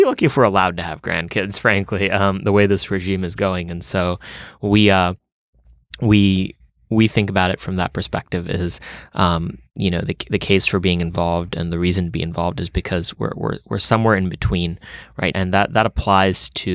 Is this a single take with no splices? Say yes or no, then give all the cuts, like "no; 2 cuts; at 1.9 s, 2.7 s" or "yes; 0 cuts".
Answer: no; 1 cut; at 15.3 s